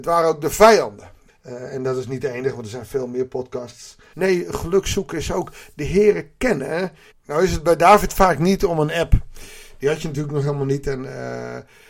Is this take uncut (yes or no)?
no